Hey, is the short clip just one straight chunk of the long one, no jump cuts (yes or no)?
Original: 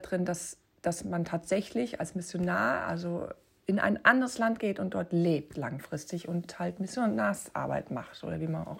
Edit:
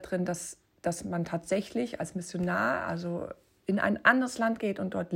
yes